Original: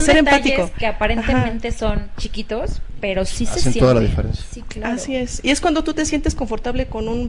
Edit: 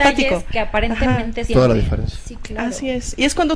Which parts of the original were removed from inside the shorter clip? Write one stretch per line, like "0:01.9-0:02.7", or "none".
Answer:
0:01.7-0:03.7

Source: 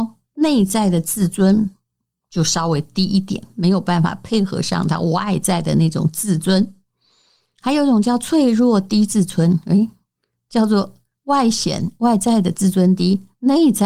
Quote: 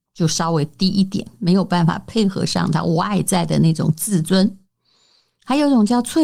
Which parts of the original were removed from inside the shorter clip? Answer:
none

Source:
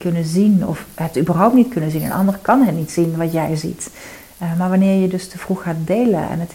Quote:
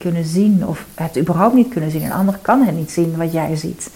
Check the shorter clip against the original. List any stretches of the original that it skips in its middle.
none

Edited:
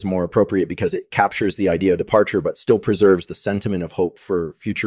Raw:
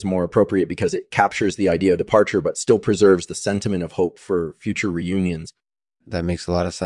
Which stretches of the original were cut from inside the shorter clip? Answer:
none

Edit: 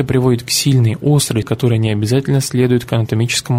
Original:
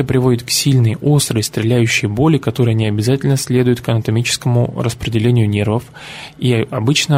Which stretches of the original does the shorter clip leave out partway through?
0:01.4-0:02.4

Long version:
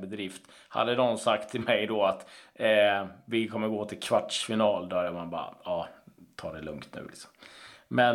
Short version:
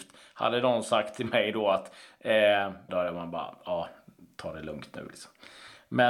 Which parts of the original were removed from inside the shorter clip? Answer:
0:03.2-0:04.9

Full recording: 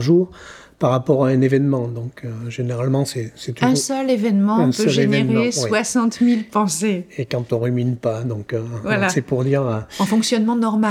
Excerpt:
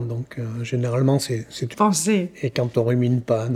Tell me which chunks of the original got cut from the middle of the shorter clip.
0:03.6-0:06.5

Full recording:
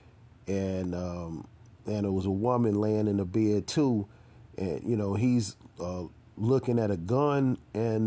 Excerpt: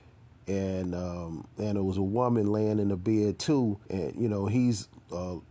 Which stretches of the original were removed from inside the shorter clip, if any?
0:01.5-0:01.8
0:04.1-0:04.5

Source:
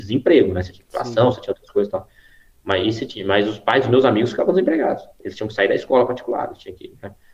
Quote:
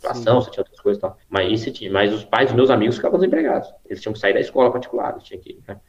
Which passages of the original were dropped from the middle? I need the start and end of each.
0:02.1-0:02.6

